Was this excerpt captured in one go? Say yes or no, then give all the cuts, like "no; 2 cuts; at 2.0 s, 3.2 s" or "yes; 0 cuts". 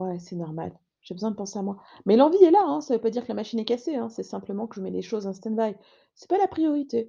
yes; 0 cuts